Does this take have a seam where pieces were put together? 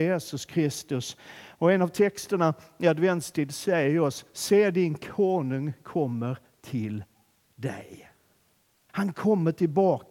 yes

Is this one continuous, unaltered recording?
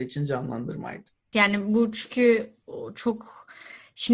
no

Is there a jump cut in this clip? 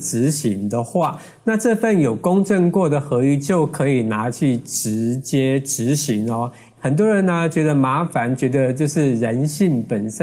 yes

